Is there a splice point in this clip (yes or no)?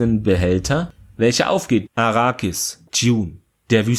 yes